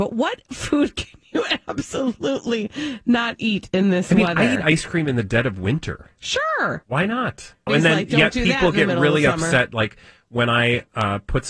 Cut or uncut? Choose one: cut